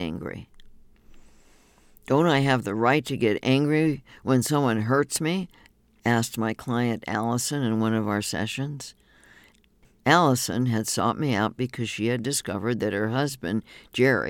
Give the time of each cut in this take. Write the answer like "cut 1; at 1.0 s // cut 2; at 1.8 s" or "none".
none